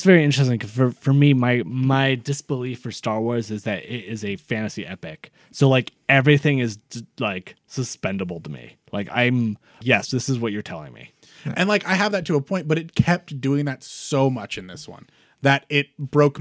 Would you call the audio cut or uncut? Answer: cut